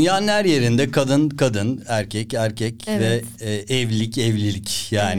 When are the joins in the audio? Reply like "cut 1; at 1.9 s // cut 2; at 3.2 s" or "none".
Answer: none